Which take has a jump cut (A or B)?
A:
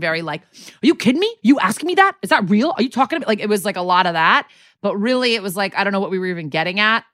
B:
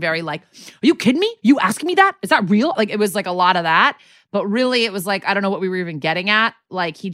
B